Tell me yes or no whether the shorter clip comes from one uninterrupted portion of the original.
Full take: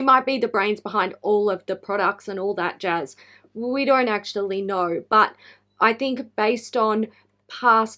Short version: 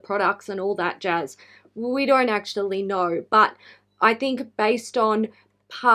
yes